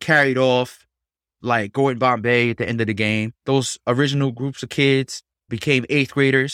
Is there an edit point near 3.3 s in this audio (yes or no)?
yes